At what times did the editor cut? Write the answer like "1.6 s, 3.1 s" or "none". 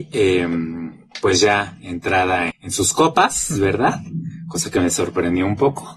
2.5 s